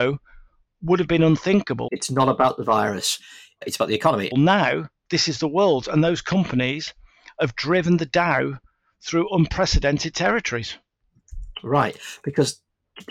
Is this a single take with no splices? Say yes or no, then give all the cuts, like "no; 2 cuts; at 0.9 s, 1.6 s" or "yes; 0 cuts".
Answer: no; 2 cuts; at 1.9 s, 4.3 s